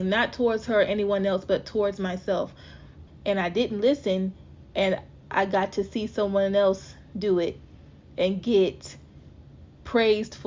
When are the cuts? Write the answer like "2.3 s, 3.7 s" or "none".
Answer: 3.1 s